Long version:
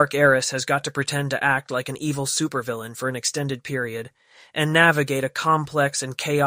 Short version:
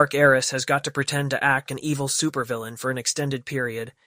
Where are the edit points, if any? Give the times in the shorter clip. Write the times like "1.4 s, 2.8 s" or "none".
1.7 s